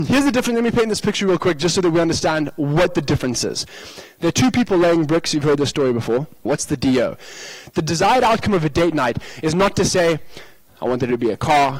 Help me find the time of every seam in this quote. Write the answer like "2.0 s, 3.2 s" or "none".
6.5 s, 10.7 s

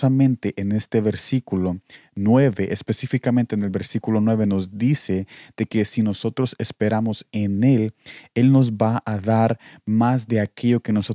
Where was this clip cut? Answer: none

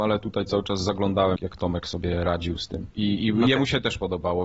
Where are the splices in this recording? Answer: 1.4 s, 2.9 s

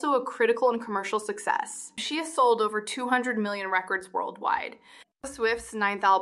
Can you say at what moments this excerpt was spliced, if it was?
2.0 s, 5.0 s

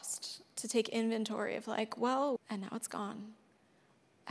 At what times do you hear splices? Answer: 2.4 s

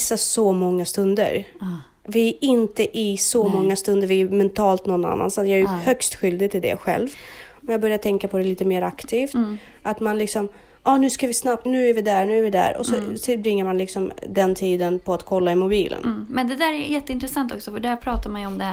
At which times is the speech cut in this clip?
11.7 s

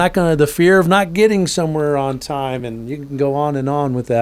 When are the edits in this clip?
none

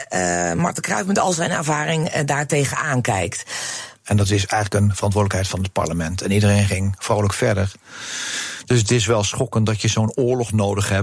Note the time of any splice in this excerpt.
4.0 s

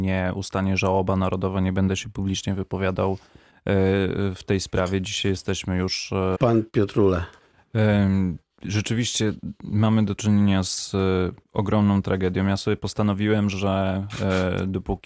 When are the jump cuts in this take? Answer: 6.3 s

